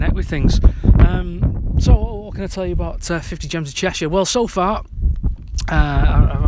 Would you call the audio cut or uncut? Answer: uncut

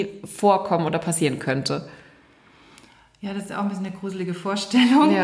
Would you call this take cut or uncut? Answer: uncut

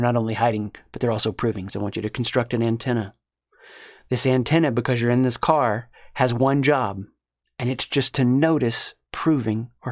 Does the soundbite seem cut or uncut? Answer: cut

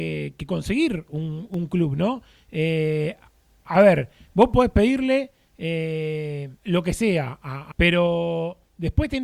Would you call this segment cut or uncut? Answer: cut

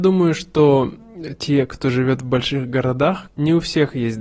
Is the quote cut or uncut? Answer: cut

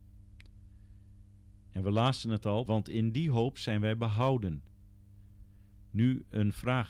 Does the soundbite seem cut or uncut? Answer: cut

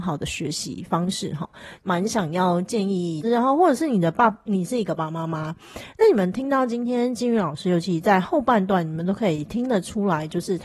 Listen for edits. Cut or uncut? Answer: cut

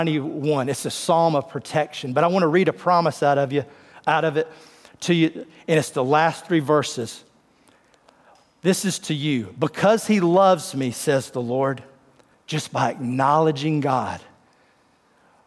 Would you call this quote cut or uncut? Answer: cut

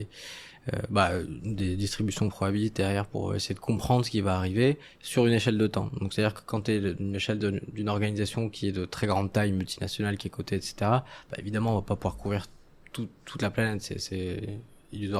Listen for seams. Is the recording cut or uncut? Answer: uncut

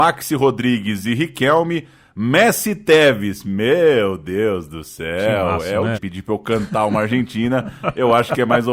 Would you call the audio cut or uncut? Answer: cut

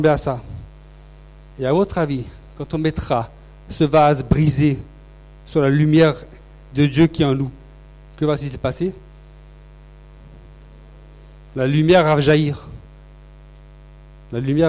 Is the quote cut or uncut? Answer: cut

